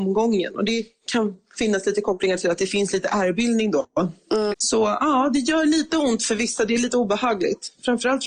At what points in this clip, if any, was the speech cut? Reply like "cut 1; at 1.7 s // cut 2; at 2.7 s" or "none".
cut 1; at 4.5 s